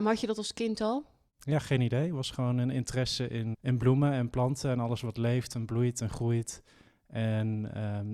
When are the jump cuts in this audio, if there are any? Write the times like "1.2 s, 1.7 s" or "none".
3.5 s